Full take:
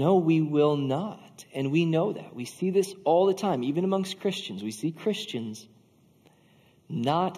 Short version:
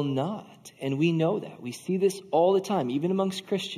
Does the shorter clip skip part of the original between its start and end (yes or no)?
no